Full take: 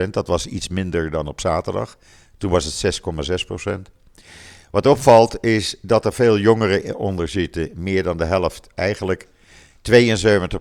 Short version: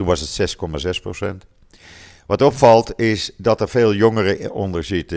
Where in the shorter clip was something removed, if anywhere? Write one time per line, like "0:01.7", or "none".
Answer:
none